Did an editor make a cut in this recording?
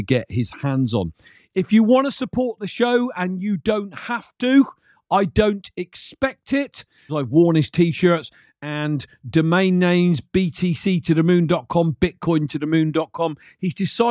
yes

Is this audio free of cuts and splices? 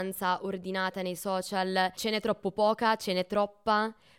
yes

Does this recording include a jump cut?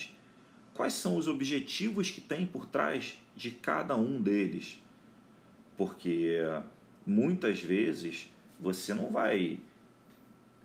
no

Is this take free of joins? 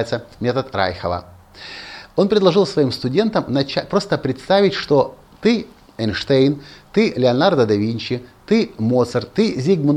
yes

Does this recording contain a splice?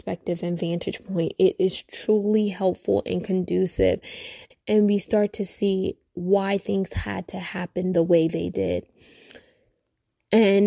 yes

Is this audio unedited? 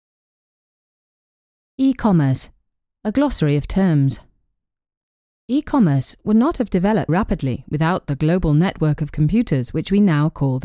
no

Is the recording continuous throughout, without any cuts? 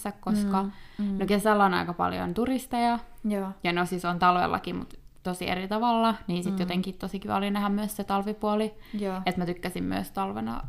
yes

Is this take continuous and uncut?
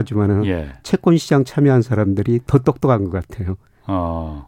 yes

